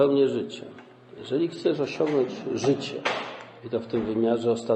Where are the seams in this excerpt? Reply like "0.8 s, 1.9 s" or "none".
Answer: none